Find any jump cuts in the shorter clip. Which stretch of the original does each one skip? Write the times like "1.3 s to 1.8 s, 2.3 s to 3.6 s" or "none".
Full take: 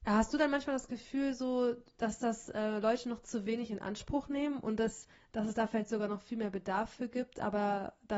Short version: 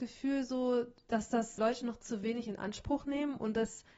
2.5 s to 2.8 s